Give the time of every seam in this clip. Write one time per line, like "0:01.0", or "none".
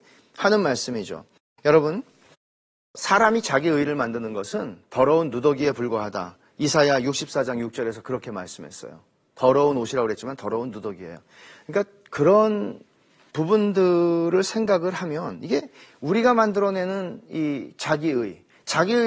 none